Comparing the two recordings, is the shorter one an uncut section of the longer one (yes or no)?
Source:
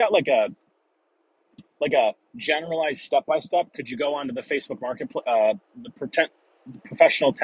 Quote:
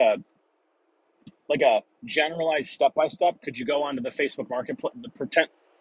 no